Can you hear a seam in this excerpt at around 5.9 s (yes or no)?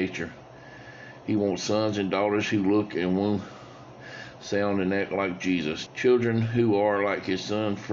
yes